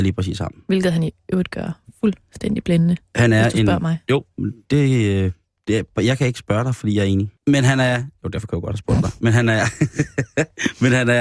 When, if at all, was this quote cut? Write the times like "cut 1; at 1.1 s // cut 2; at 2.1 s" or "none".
cut 1; at 7.4 s